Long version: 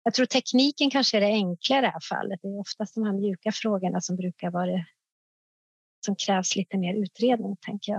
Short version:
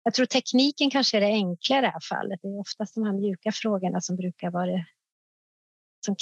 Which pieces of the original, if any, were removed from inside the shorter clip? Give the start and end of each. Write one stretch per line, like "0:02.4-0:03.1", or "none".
none